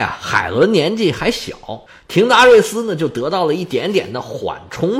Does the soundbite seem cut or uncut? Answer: uncut